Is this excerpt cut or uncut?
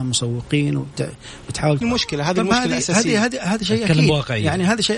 cut